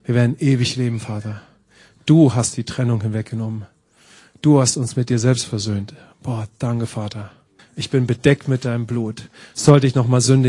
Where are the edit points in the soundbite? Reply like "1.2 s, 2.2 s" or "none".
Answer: 7.6 s